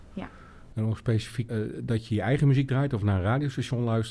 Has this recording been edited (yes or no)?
yes